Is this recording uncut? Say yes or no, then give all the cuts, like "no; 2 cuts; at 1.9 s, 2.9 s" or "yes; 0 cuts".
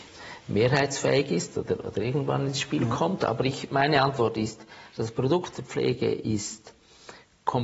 yes; 0 cuts